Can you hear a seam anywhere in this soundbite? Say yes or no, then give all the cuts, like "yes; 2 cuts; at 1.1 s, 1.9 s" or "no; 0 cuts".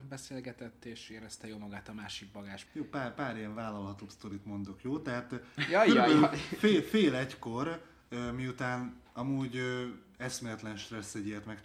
yes; 1 cut; at 2.7 s